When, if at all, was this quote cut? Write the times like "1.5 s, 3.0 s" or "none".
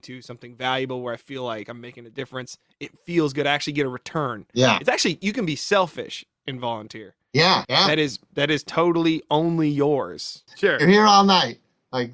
7.6 s, 10.5 s